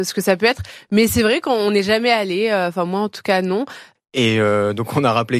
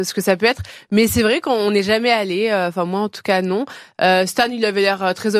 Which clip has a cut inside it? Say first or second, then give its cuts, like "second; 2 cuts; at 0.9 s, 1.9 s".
first; 1 cut; at 4.0 s